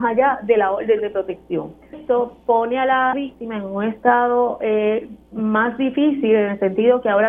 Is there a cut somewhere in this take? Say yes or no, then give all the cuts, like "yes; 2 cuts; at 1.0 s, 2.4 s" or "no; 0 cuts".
yes; 2 cuts; at 1.9 s, 3.1 s